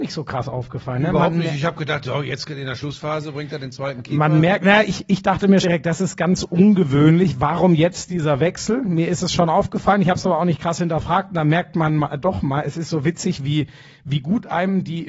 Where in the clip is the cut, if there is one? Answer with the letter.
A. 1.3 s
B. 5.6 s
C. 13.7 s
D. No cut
B